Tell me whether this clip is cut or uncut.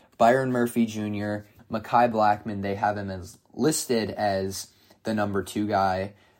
cut